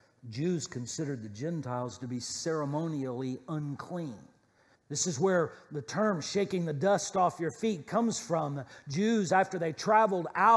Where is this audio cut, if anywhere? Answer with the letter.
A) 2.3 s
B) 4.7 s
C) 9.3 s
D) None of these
B